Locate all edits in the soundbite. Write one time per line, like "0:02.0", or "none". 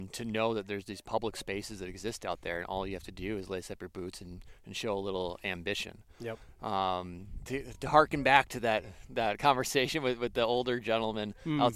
none